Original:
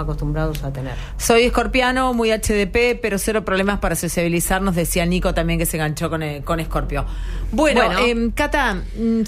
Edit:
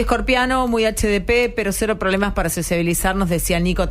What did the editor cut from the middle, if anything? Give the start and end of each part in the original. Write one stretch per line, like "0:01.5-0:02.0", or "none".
none